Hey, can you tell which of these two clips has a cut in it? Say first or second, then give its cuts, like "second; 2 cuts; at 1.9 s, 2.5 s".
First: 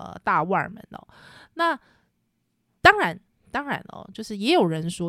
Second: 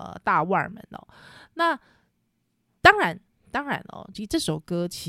second; 1 cut; at 4.1 s